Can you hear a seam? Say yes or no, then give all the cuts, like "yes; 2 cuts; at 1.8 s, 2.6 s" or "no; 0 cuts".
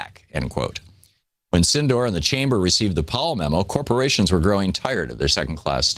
no; 0 cuts